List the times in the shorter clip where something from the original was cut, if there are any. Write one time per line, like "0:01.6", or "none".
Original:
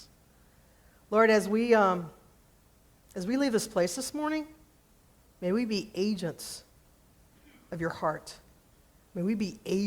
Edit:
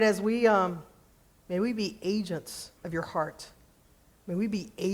0:01.4
0:02.8